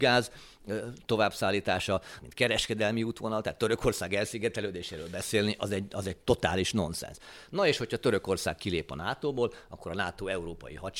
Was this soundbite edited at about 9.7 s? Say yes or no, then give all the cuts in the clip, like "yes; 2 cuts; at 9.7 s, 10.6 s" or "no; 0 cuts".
no; 1 cut; at 2.2 s